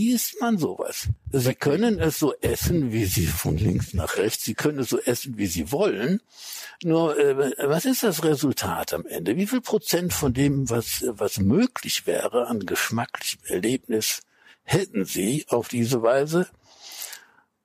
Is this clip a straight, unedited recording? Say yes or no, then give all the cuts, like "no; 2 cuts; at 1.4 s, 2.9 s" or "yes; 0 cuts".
yes; 0 cuts